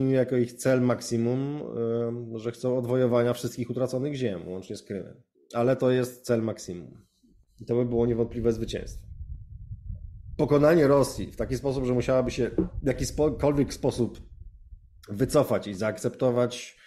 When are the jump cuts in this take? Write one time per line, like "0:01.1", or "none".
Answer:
0:05.4